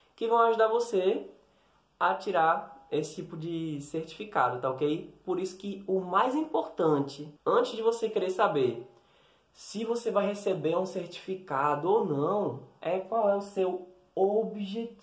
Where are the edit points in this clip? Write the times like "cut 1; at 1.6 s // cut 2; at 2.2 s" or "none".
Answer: cut 1; at 7.4 s